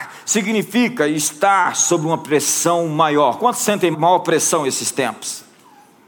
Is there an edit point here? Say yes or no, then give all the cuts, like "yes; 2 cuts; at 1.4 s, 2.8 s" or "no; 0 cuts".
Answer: yes; 1 cut; at 3.9 s